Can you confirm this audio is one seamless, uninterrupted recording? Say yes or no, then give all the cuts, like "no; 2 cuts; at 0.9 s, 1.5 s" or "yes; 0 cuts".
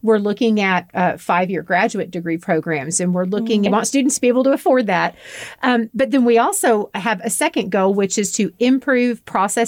no; 1 cut; at 3.7 s